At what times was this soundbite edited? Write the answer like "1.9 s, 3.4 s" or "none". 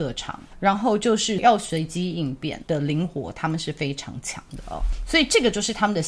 2.6 s